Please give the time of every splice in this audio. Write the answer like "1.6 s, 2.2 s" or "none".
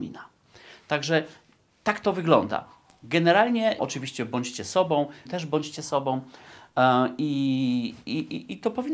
3.8 s, 5.3 s